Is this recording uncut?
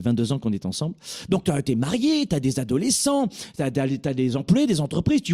yes; 0 cuts

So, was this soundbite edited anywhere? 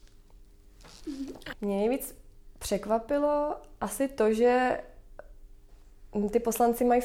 yes; 1 cut; at 1.5 s

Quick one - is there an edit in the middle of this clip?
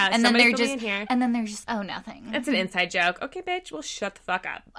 yes; 1 cut; at 1.6 s

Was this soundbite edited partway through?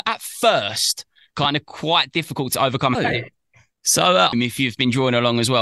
yes; 2 cuts; at 2.9 s, 4.3 s

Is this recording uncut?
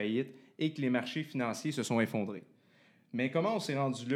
yes; 0 cuts

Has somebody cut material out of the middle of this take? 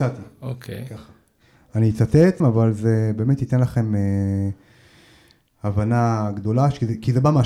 yes; 1 cut; at 2.4 s

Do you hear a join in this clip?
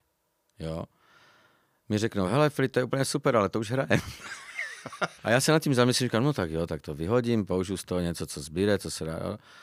yes; 1 cut; at 5.2 s

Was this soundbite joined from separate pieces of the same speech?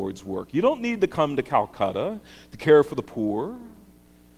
no; 0 cuts

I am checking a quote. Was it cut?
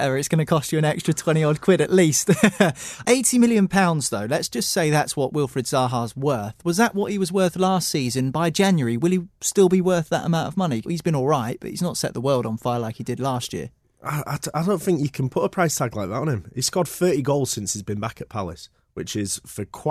yes; 1 cut; at 10.8 s

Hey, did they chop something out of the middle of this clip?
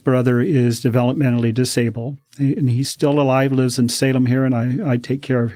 no; 0 cuts

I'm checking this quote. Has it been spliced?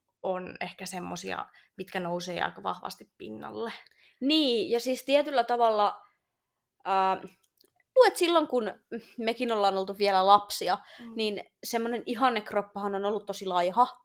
yes; 1 cut; at 8.0 s

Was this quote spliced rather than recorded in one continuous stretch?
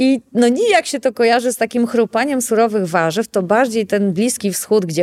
no; 0 cuts

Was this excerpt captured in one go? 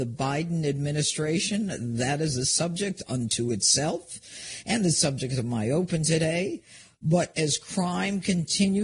yes; 0 cuts

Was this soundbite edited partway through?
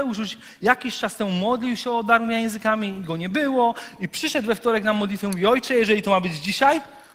yes; 1 cut; at 4.0 s

